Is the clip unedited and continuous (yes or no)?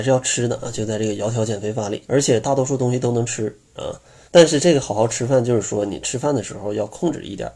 no